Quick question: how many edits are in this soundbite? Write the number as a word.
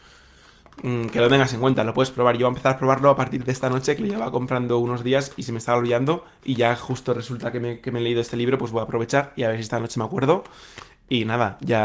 zero